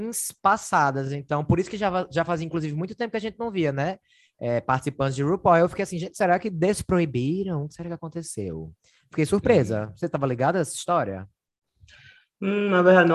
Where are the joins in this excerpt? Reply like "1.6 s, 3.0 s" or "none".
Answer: none